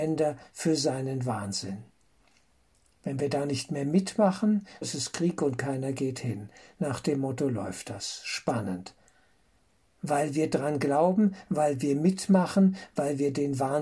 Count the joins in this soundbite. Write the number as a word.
one